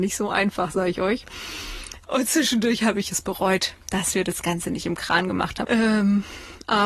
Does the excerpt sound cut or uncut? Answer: cut